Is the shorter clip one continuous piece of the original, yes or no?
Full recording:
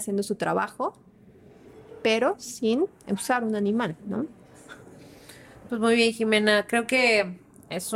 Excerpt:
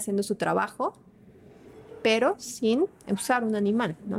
yes